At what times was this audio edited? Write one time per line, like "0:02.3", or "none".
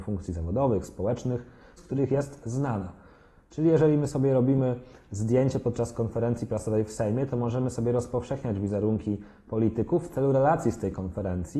0:01.8